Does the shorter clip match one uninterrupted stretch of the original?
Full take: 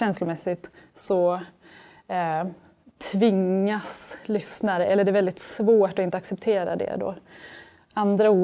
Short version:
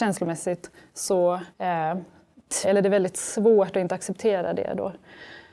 no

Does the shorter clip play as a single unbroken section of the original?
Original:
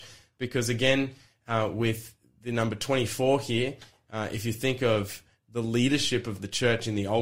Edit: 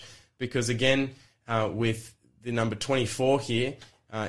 yes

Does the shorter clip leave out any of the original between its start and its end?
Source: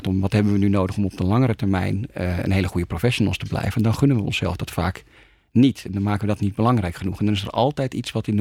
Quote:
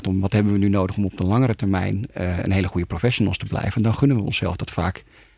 no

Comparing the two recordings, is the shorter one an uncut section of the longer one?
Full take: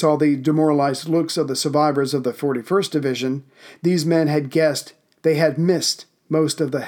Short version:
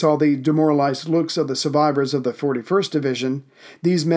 yes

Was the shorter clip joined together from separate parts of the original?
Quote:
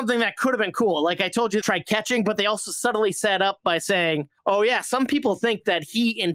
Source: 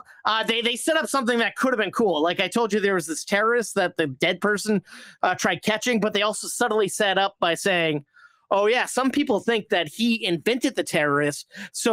yes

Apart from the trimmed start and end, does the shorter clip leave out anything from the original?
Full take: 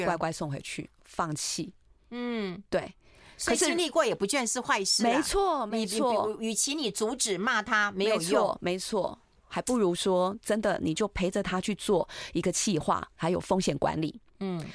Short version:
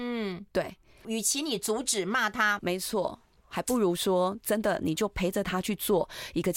yes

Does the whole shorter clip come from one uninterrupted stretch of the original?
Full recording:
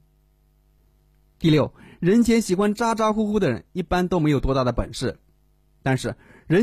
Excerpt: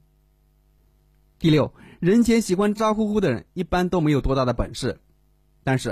no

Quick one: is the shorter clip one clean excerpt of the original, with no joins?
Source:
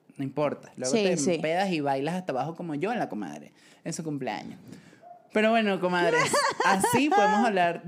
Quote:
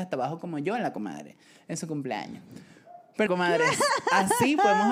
no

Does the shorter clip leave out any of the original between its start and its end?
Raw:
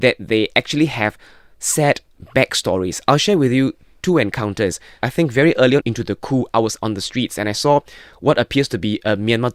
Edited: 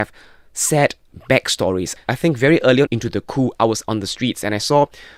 yes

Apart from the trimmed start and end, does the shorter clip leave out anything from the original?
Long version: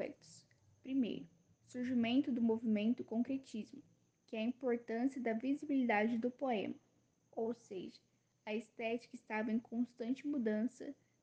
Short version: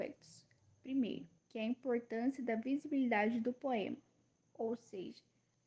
yes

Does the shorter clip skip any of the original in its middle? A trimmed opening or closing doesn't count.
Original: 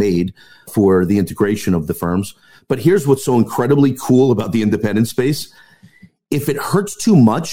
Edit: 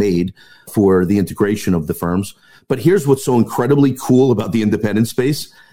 no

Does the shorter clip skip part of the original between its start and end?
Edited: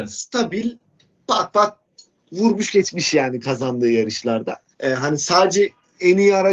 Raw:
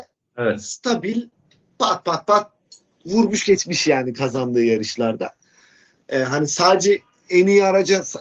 yes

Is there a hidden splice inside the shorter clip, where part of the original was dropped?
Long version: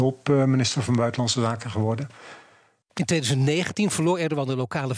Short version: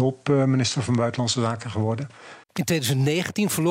yes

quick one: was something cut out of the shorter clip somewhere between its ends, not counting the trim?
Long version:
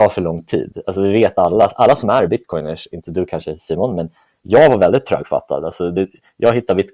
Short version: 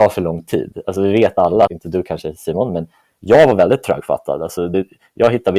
yes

